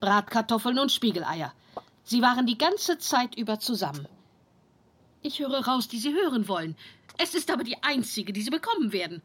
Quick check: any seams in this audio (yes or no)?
yes